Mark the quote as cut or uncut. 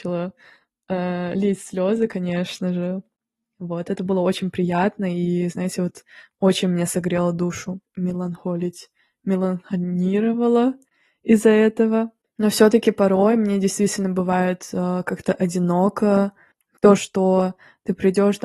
cut